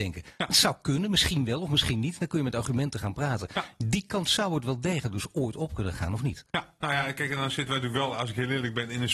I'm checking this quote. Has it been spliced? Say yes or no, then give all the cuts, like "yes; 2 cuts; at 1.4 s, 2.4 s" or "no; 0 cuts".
no; 0 cuts